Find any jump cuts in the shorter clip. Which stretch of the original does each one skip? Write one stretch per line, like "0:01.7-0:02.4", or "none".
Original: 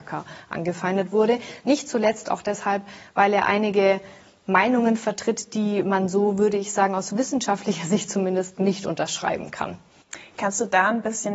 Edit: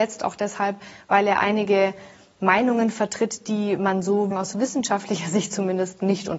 0:06.4-0:06.9